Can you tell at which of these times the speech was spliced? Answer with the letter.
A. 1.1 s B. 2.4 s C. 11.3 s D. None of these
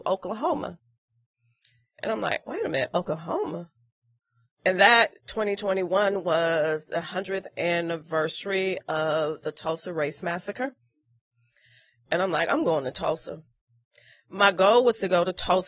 D